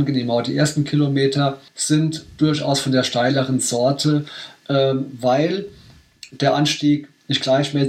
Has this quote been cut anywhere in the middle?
yes; 1 cut; at 1.7 s

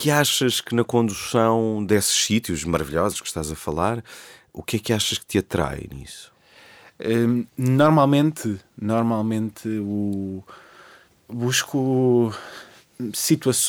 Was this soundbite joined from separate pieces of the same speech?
no; 0 cuts

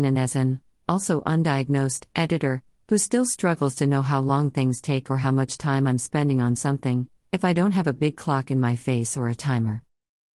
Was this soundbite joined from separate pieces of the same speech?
no; 0 cuts

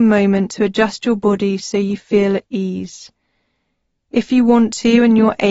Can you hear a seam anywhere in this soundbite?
no; 0 cuts

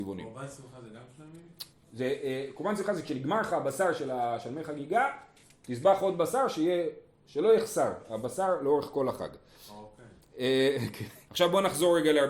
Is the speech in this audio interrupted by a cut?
yes; 2 cuts; at 1.7 s, 11.3 s

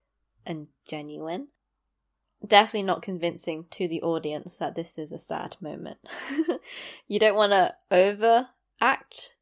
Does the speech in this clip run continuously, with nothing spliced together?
yes; 0 cuts

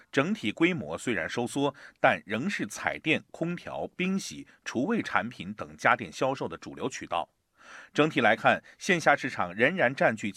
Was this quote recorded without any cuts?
yes; 0 cuts

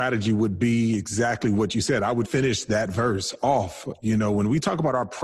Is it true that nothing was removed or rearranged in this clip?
no; 1 cut; at 2.2 s

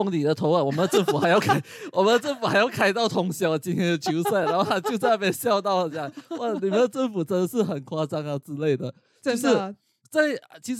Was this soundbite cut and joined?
no; 0 cuts

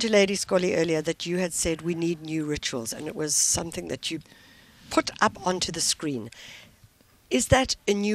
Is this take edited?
no; 0 cuts

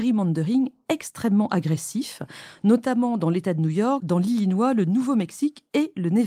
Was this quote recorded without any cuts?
no; 1 cut; at 4.0 s

